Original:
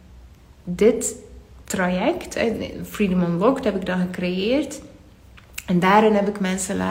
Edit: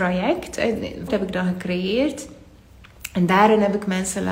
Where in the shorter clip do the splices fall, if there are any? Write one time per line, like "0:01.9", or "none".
0:01.1